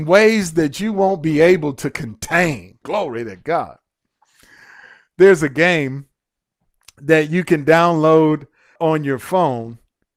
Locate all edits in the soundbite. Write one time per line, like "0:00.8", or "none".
0:02.8
0:08.8